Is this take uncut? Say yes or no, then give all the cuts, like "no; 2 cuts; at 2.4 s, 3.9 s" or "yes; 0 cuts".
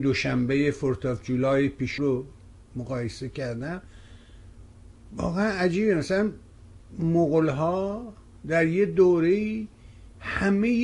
no; 1 cut; at 2.0 s